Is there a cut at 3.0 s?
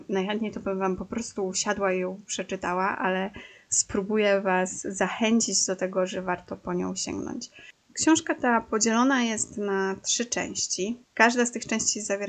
no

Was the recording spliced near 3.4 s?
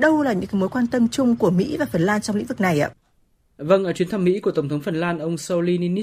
no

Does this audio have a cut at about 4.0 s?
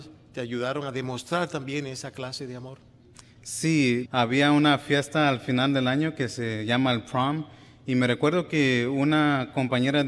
yes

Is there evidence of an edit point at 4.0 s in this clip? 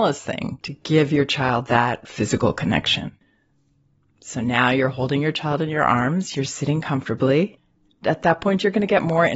no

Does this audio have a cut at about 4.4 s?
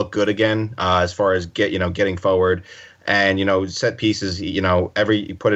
no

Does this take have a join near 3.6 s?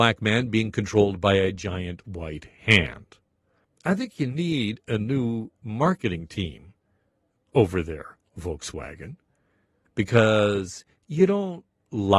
yes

